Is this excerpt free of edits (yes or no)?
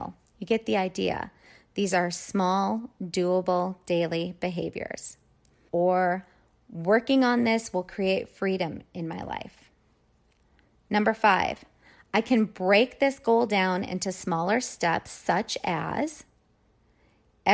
no